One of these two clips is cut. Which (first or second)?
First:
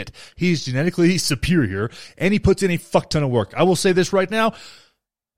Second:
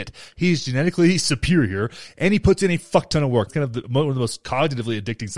second